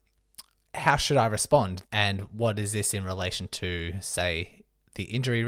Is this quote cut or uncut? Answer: cut